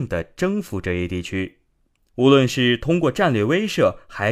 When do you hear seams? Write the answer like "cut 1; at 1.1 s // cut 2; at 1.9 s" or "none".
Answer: none